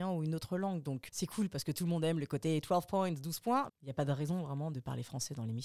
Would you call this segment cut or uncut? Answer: cut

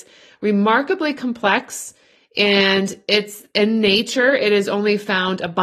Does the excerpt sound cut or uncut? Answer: uncut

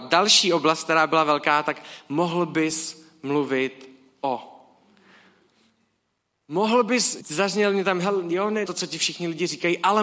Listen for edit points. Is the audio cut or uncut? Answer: cut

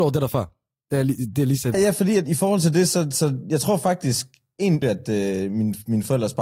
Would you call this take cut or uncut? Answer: cut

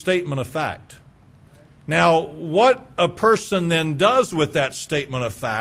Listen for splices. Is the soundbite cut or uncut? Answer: uncut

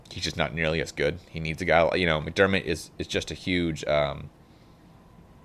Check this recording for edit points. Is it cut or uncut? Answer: uncut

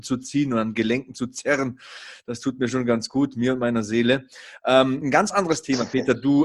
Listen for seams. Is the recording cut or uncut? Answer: uncut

